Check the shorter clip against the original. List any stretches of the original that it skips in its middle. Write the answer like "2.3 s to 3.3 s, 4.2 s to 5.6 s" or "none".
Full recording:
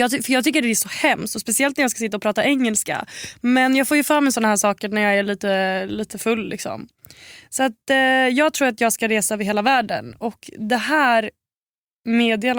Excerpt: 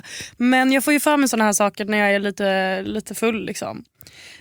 none